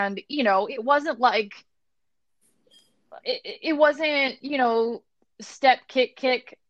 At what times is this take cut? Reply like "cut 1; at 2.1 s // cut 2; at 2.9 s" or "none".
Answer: none